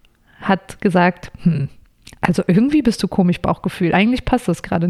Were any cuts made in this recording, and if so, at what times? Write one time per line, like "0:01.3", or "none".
none

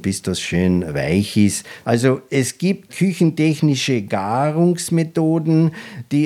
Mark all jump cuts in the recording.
0:01.8
0:02.9

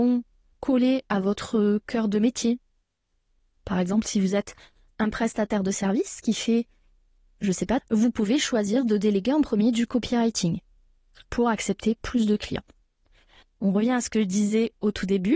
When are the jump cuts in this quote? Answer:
0:07.8
0:13.4

